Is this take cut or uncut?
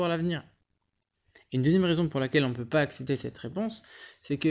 uncut